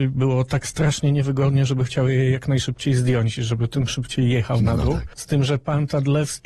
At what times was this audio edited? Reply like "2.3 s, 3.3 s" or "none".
5.2 s